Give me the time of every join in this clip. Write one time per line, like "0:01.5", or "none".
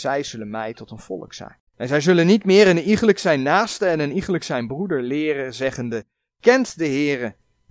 0:01.7